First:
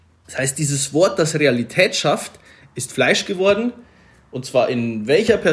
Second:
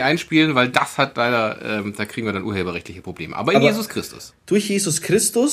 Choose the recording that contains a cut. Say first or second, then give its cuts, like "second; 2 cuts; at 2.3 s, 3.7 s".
second; 1 cut; at 4.3 s